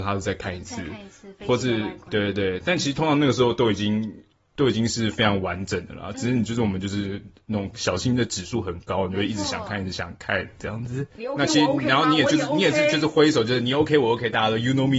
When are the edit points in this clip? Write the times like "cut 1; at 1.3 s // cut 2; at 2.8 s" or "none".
cut 1; at 11.2 s